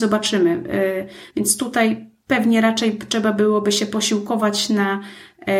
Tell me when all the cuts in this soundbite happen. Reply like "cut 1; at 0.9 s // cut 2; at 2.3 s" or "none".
none